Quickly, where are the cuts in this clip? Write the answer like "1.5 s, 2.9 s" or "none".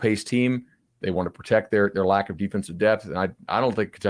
none